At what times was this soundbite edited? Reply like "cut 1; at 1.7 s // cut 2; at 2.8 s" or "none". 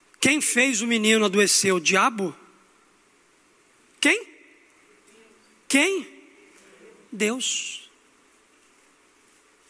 none